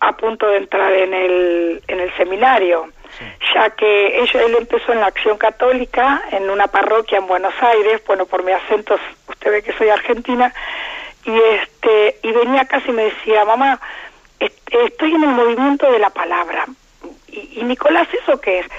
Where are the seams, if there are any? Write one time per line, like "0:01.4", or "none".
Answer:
none